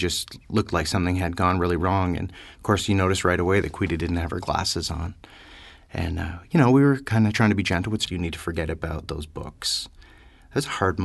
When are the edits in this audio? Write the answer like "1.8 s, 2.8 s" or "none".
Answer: 8.1 s